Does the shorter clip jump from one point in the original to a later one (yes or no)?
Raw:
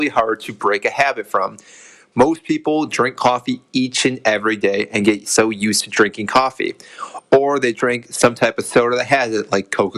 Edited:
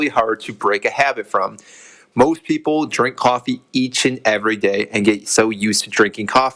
no